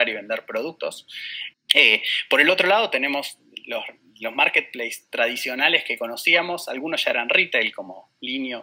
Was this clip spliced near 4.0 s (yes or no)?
no